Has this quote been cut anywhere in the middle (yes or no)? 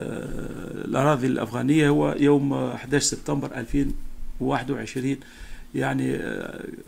no